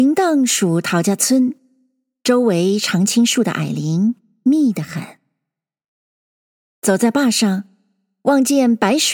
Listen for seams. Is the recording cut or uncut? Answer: uncut